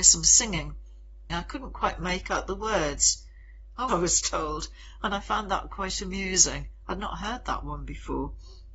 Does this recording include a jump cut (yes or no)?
yes